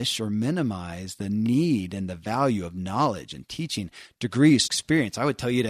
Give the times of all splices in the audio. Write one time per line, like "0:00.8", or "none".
0:04.6